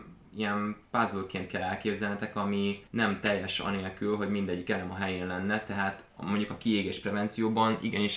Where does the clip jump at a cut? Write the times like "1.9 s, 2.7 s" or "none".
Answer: 2.9 s